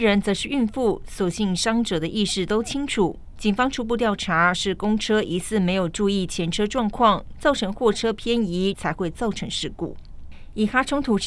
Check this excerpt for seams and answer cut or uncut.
cut